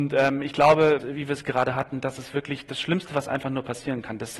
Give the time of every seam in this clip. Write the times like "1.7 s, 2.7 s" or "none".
1.0 s